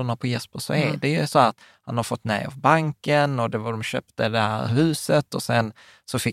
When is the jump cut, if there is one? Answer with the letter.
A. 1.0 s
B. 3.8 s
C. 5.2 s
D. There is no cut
D